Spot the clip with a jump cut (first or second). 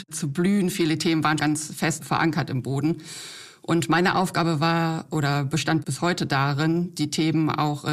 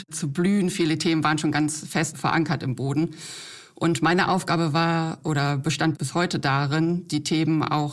first